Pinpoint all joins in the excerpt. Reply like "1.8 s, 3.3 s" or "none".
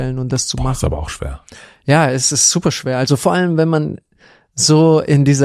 none